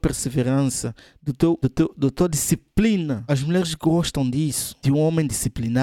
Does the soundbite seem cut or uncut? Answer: uncut